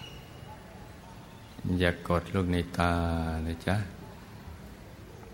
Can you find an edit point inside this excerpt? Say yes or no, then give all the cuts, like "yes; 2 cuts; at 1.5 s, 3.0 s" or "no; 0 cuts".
no; 0 cuts